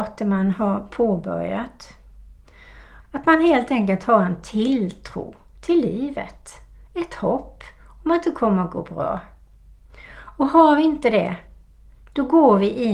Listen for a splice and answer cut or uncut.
cut